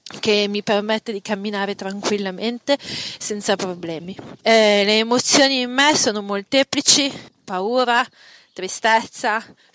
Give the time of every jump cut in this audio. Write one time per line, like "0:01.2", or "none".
0:04.4
0:07.3